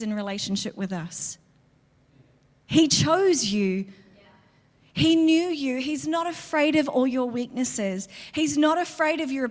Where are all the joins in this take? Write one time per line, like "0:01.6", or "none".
none